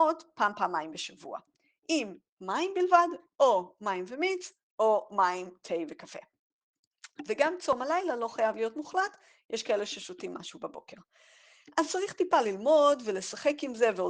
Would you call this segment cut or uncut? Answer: uncut